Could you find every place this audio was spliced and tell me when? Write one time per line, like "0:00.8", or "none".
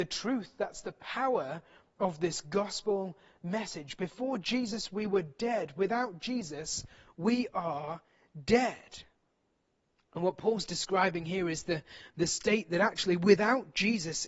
none